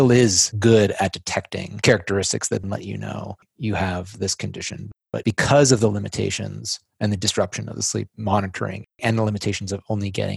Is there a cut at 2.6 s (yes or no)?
yes